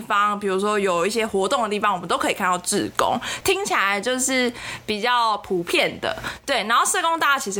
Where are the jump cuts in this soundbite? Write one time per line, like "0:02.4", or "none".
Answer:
0:03.4